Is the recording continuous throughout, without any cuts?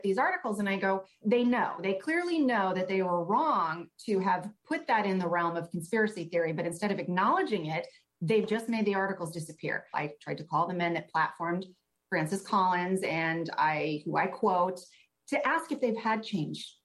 no; 2 cuts; at 1.2 s, 9.9 s

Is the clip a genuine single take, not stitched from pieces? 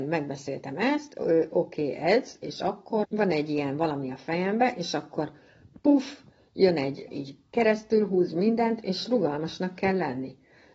no; 2 cuts; at 3.0 s, 7.1 s

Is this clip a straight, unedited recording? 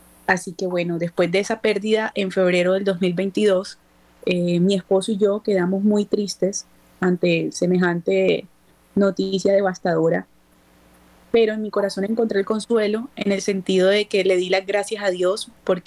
yes; 0 cuts

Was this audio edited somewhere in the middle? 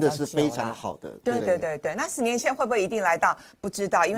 yes; 1 cut; at 1.4 s

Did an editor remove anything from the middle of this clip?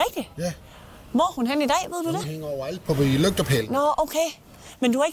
no; 0 cuts

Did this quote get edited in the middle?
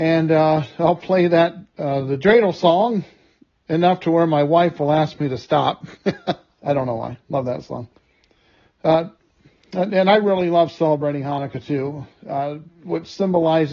yes; 1 cut; at 6.6 s

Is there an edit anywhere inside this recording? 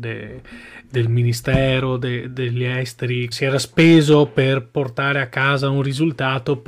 yes; 1 cut; at 3.3 s

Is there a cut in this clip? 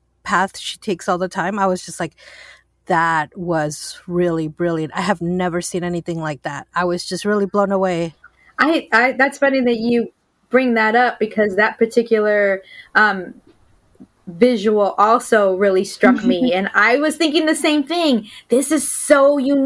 no; 0 cuts

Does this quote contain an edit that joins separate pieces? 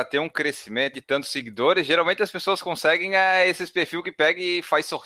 yes; 1 cut; at 0.9 s

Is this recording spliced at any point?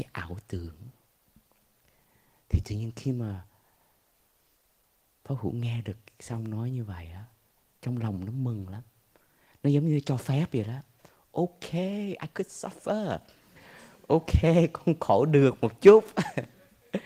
no; 0 cuts

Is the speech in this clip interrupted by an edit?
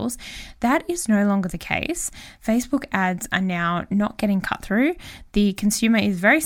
no; 0 cuts

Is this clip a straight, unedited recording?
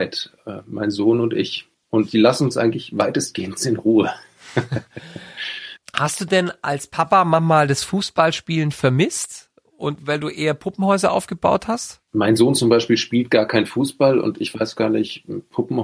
yes; 0 cuts

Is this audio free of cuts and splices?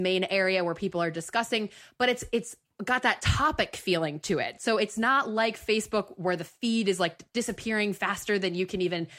yes; 0 cuts

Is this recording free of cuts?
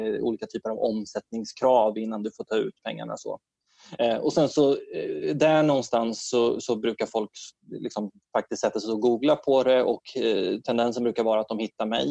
yes; 0 cuts

